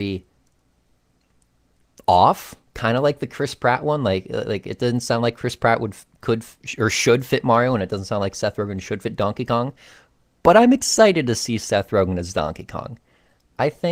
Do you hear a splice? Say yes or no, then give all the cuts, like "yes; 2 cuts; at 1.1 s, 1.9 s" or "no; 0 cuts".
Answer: no; 0 cuts